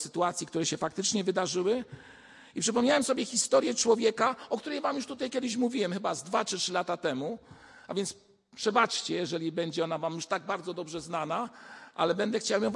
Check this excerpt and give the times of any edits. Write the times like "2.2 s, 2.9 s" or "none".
none